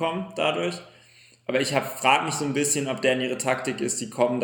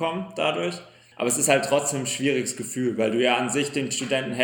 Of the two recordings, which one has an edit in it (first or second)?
second